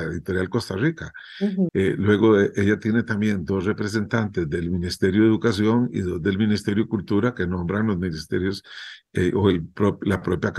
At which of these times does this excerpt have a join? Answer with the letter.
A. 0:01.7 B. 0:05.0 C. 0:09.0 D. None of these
A